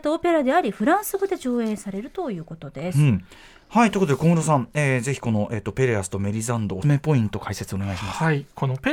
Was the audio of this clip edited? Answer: yes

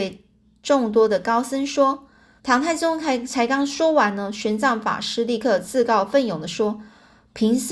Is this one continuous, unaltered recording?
no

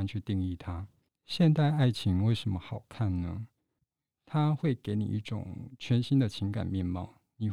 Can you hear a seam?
yes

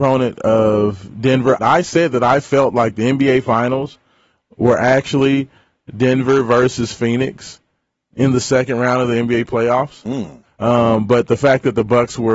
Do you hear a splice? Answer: yes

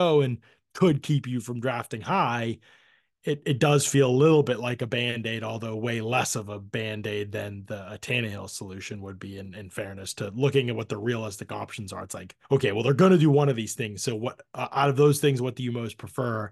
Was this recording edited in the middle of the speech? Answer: yes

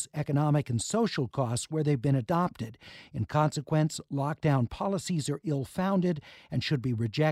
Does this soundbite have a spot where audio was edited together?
no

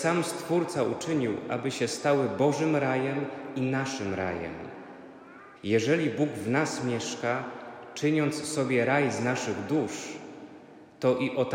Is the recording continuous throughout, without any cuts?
no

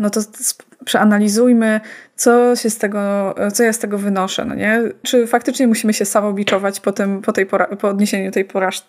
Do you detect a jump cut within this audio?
yes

